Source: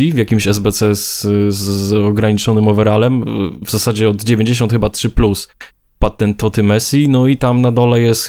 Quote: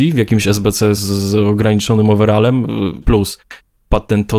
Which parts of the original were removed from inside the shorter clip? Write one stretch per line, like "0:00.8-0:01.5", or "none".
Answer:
0:01.0-0:01.5
0:03.6-0:05.1